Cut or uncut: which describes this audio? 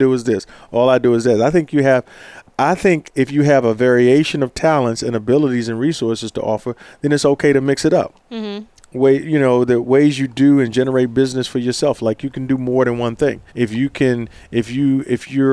cut